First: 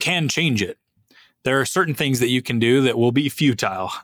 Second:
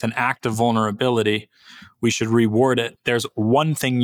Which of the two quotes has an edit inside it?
second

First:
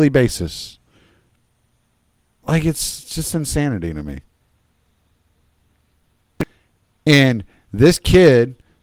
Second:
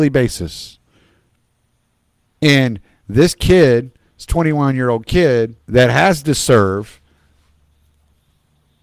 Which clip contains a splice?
second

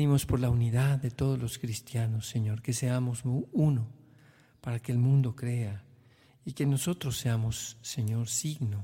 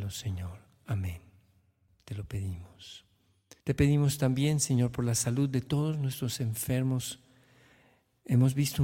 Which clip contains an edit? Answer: second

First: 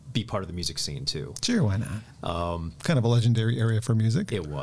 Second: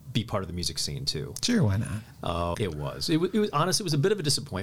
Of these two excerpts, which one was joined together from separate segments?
second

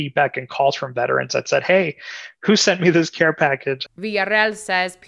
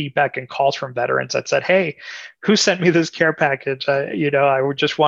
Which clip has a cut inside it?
first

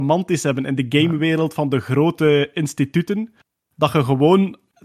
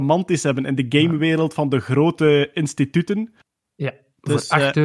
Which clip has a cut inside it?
second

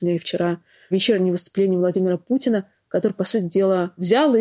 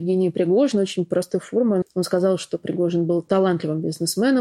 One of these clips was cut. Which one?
second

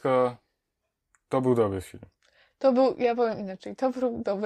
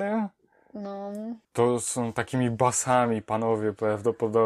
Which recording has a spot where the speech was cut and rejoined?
second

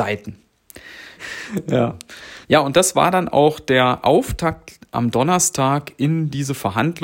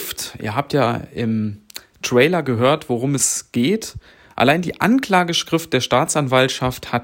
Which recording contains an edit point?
first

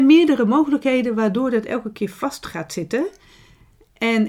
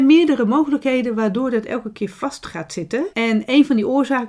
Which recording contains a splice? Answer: second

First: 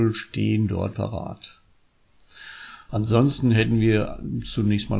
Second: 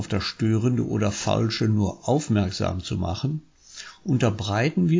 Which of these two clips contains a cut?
first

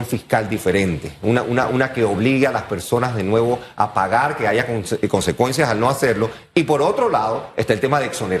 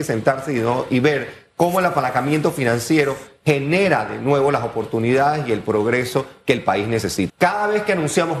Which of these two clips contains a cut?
second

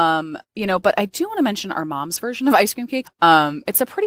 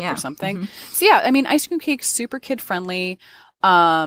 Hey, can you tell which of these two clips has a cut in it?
first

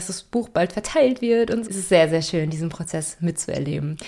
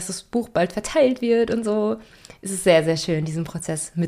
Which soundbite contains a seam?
first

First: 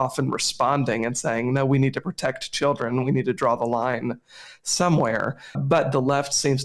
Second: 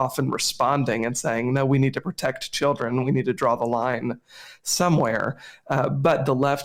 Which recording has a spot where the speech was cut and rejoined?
first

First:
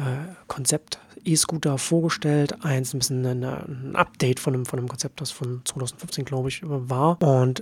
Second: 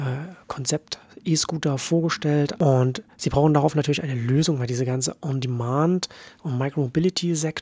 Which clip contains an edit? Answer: second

